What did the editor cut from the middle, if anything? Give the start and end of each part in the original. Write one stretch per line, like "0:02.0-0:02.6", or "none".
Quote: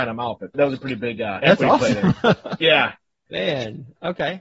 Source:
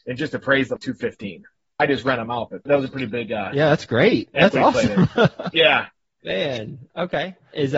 0:03.5-0:04.3